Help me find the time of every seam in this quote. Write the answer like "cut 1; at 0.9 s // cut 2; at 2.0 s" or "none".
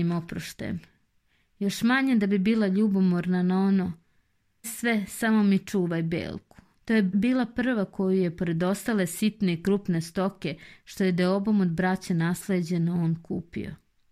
cut 1; at 4.6 s // cut 2; at 6.8 s